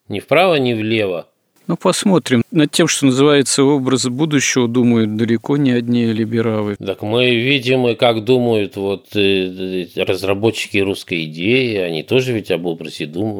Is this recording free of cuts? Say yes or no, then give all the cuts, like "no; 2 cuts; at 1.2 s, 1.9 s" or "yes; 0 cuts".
yes; 0 cuts